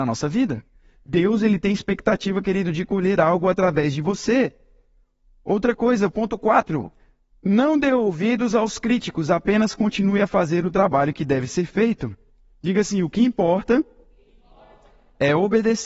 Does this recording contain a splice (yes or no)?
no